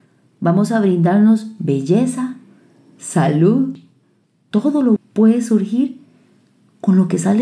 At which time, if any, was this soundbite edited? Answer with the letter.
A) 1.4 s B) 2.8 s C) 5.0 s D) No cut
C